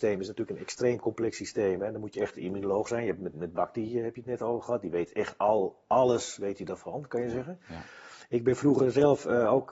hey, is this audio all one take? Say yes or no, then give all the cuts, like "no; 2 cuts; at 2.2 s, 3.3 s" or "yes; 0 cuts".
no; 1 cut; at 3.3 s